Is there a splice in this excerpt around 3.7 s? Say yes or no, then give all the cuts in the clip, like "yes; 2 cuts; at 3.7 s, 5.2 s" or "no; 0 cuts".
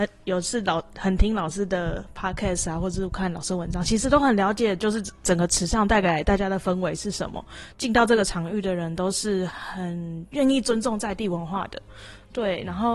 no; 2 cuts; at 7.7 s, 9.5 s